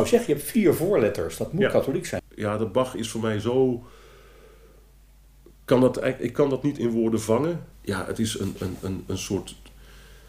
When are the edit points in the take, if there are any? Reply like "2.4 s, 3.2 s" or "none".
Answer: 2.2 s